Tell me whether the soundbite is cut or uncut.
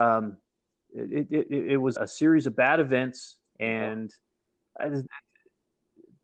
cut